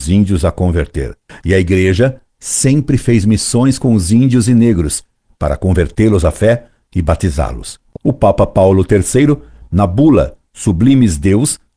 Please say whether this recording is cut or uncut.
cut